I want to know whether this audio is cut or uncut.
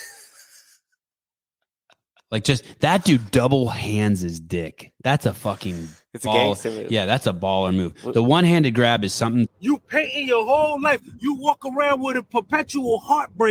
cut